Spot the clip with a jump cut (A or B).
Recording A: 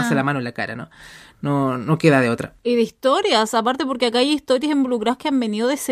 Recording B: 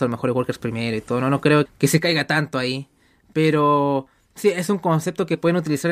B